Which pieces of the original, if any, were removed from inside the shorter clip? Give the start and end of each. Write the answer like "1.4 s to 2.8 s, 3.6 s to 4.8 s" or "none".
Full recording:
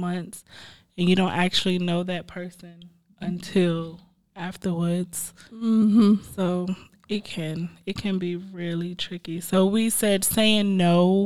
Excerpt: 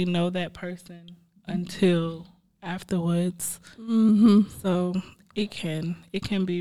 none